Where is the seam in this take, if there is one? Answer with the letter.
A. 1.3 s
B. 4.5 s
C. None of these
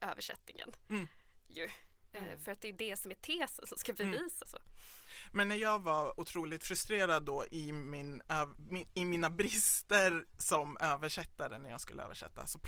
B